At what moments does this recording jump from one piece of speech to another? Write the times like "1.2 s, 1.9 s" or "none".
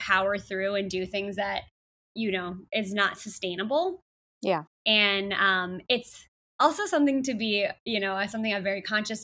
4.7 s